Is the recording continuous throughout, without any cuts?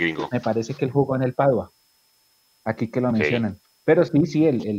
yes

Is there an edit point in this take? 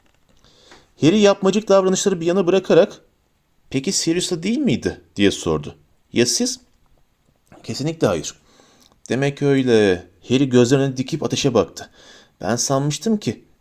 no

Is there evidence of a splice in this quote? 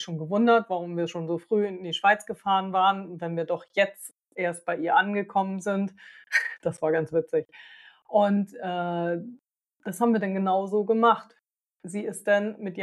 no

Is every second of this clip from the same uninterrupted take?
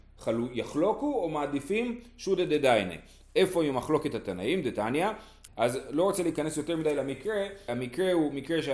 no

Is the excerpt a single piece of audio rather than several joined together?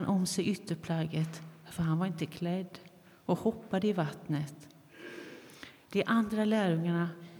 yes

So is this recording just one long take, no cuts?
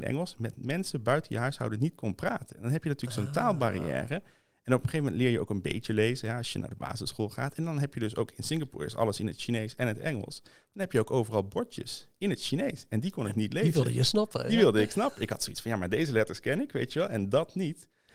yes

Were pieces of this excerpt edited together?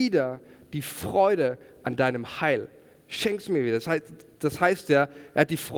no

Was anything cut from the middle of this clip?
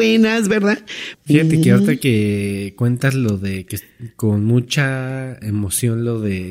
yes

